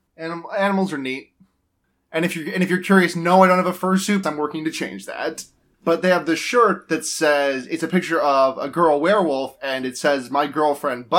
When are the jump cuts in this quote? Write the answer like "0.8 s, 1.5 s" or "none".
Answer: 4.2 s, 5.7 s